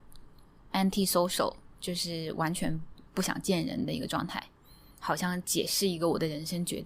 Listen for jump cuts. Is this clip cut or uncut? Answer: cut